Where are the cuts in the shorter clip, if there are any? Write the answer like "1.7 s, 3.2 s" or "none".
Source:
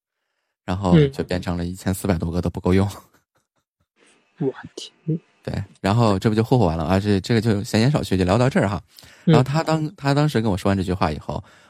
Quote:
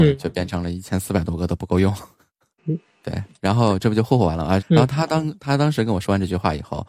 2.6 s, 4.6 s